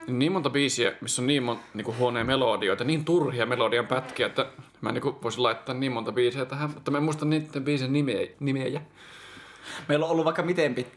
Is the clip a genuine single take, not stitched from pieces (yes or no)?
no